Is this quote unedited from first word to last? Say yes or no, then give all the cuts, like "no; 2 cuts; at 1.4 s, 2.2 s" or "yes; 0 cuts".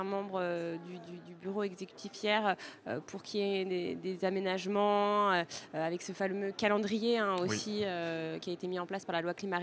yes; 0 cuts